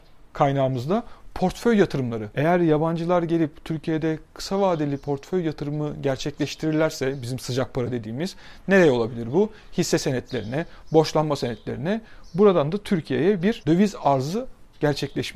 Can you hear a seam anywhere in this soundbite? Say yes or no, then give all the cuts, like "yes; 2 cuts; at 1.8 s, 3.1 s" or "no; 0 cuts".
no; 0 cuts